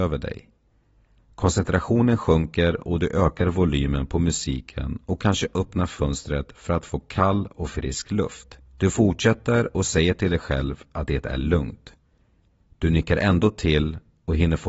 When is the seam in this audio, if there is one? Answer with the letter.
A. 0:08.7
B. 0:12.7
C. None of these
A